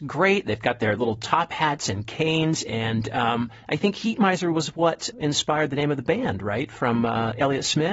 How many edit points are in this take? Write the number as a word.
one